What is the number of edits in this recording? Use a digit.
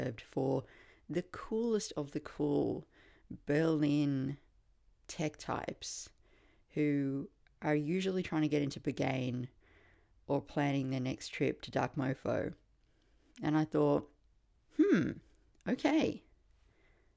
0